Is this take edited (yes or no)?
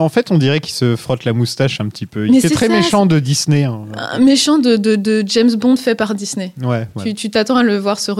no